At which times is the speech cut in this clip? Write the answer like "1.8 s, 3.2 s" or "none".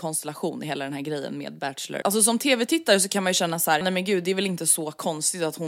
2.0 s, 3.8 s